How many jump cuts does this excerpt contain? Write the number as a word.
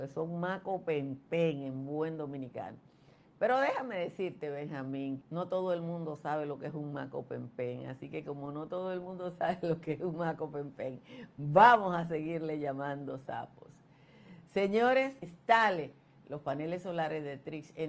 two